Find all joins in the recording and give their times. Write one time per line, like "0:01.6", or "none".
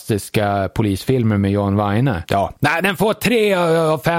0:02.3